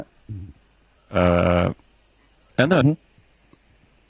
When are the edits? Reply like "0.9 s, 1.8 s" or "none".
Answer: 1.0 s, 2.8 s